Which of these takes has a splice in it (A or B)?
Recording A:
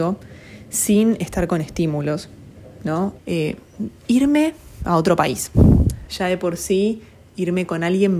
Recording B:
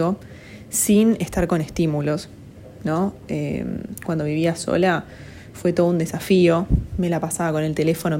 A